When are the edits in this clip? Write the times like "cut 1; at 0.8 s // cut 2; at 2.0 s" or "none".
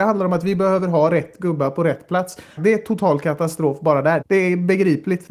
cut 1; at 2.6 s // cut 2; at 4.2 s